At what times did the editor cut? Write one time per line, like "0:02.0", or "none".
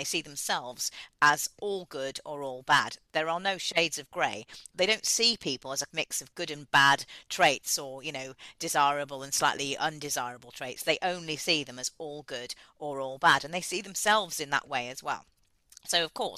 none